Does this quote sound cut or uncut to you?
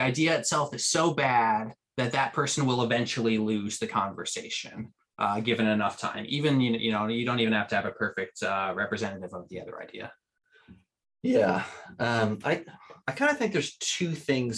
uncut